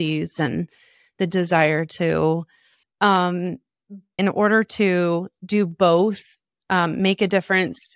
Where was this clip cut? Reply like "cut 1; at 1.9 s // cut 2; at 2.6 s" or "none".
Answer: cut 1; at 2.8 s // cut 2; at 4.2 s